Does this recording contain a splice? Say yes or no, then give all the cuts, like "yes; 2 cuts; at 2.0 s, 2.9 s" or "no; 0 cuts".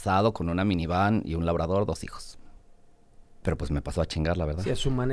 yes; 1 cut; at 3.4 s